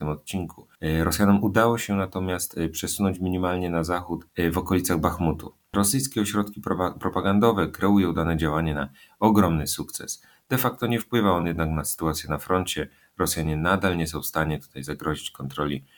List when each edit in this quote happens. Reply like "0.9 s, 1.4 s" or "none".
none